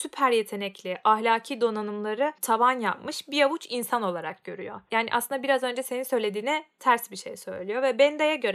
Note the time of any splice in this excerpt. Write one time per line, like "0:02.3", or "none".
none